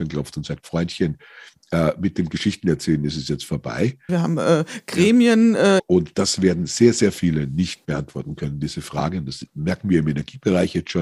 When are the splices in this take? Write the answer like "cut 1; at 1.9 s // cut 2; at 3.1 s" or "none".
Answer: cut 1; at 4.1 s // cut 2; at 5.8 s // cut 3; at 7.8 s